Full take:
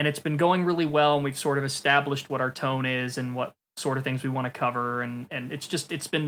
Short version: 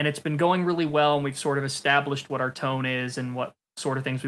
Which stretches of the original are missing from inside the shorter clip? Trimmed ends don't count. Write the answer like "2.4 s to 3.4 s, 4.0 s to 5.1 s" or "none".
none